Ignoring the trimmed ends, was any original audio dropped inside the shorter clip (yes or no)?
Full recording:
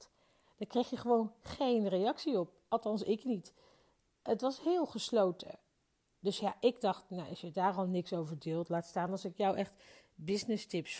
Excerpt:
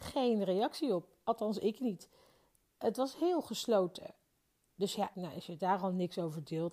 yes